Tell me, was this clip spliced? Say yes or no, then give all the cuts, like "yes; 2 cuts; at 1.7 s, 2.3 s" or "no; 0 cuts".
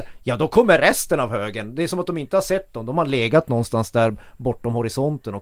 no; 0 cuts